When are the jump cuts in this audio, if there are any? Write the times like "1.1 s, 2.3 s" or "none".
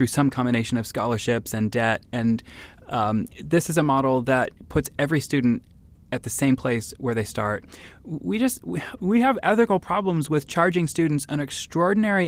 none